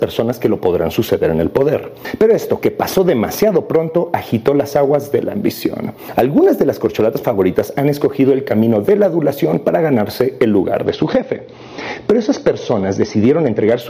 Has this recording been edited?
no; 0 cuts

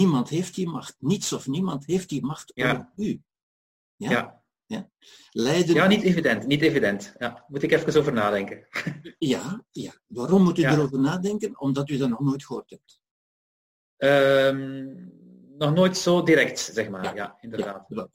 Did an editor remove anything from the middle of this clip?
no; 0 cuts

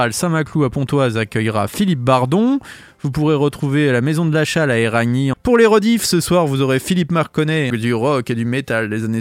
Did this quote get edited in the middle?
yes; 2 cuts; at 5.3 s, 7.7 s

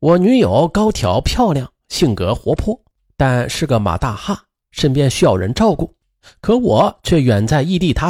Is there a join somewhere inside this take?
no; 0 cuts

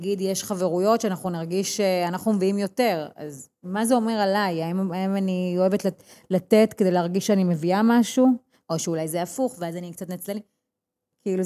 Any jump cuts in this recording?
yes; 1 cut; at 8.6 s

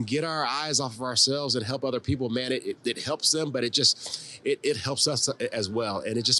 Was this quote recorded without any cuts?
yes; 0 cuts

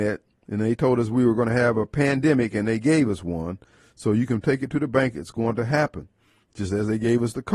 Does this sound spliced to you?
yes; 1 cut; at 6.4 s

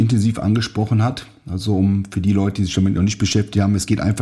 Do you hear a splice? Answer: no; 0 cuts

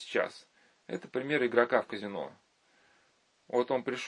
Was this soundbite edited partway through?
no; 0 cuts

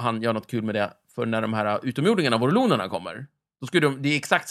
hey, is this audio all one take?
yes; 0 cuts

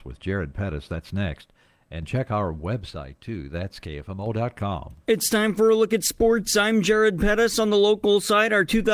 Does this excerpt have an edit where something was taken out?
no; 0 cuts

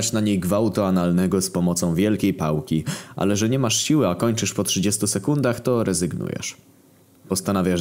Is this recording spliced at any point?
no; 0 cuts

